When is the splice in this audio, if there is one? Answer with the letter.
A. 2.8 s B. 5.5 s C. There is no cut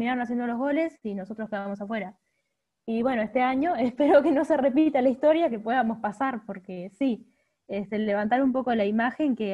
C